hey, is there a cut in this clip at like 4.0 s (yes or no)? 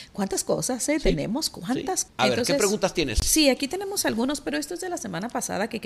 no